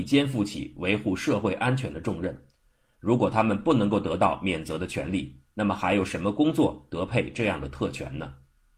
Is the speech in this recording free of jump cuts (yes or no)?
yes